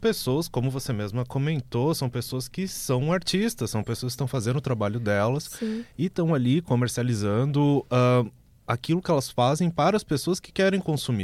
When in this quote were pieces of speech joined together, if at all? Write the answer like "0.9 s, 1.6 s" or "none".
none